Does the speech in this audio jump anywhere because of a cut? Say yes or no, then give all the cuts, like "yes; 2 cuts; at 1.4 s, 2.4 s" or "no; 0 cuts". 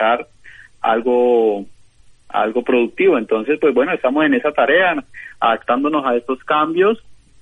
no; 0 cuts